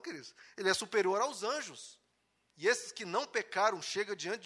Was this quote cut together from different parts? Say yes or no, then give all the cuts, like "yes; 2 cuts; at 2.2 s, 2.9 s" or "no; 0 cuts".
yes; 1 cut; at 2.5 s